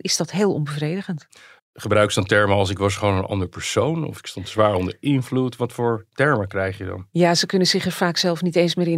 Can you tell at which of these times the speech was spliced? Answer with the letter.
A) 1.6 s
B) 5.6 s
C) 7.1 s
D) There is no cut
A